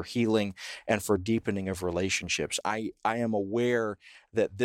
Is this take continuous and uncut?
no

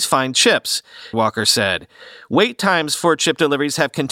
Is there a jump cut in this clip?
yes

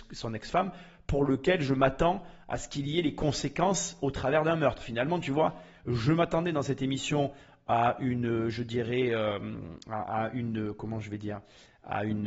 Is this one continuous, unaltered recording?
yes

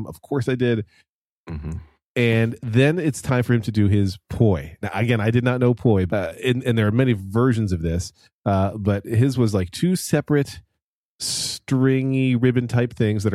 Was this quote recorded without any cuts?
no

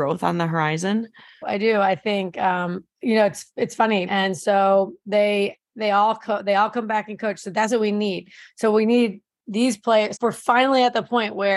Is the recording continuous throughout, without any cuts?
no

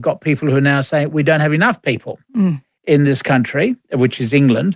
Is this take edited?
no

